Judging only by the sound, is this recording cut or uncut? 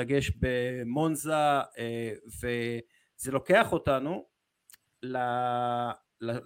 uncut